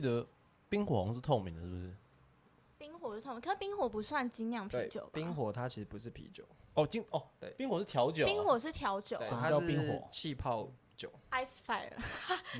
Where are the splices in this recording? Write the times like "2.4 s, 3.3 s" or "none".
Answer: none

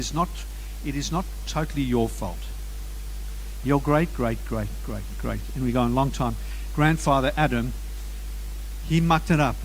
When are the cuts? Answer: 4.1 s

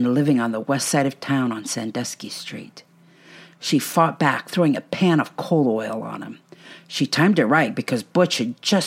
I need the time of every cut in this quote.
none

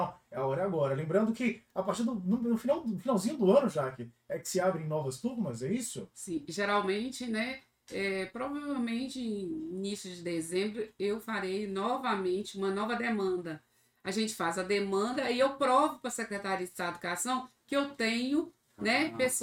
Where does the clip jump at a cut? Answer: none

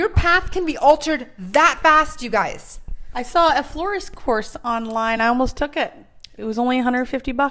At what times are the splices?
none

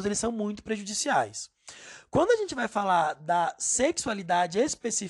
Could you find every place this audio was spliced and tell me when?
none

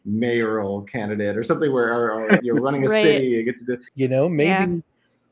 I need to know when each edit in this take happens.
2.4 s, 3.9 s

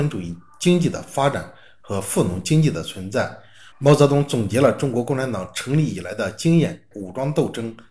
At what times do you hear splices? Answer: 3.7 s, 6.9 s

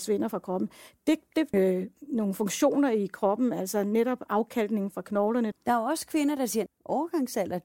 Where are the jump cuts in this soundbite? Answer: 1.5 s, 5.5 s, 6.7 s

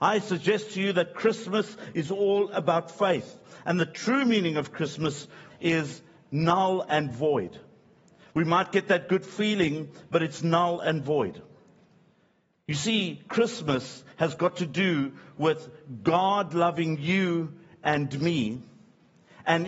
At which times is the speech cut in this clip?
5.5 s

